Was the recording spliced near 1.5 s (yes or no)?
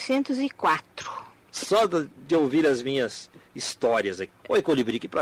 yes